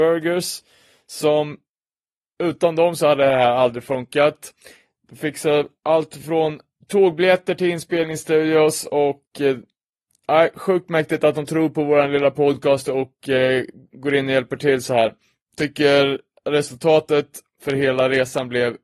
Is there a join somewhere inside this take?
no; 0 cuts

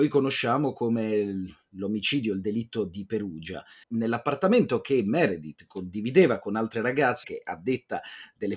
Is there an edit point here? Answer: yes; 2 cuts; at 3.8 s, 7.2 s

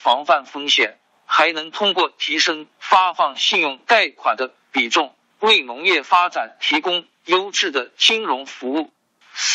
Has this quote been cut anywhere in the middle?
no; 0 cuts

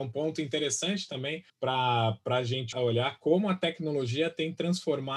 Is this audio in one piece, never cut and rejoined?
no; 2 cuts; at 1.5 s, 2.7 s

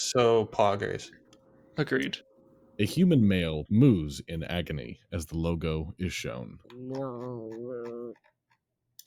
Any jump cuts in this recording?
yes; 2 cuts; at 3.7 s, 6.6 s

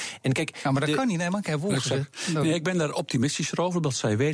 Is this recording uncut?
yes; 0 cuts

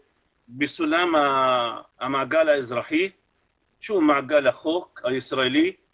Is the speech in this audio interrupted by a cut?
yes; 1 cut; at 1.9 s

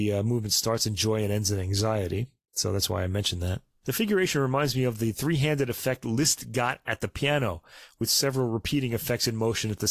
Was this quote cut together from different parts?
no; 0 cuts

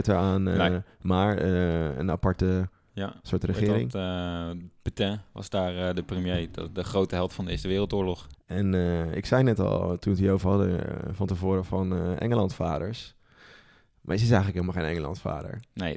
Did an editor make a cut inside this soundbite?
yes; 1 cut; at 8.3 s

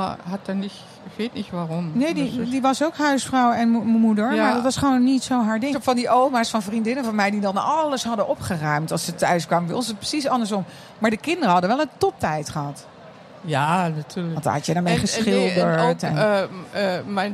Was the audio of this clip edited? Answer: yes; 1 cut; at 5.7 s

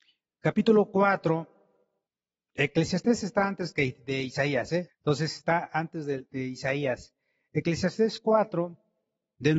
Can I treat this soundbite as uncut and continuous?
no; 1 cut; at 4.9 s

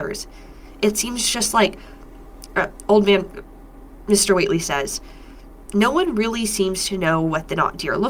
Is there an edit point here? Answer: no; 0 cuts

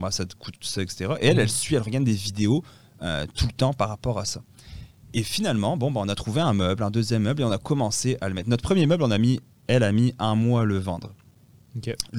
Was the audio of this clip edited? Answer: no; 0 cuts

